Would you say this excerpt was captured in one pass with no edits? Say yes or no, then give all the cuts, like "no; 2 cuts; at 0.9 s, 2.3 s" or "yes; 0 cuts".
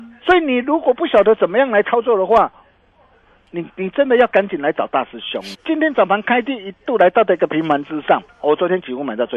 no; 2 cuts; at 5.5 s, 8.3 s